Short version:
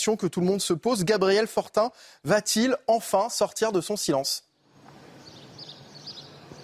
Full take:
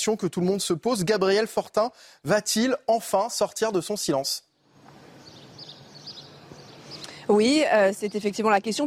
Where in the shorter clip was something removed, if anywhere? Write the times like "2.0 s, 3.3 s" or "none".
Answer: none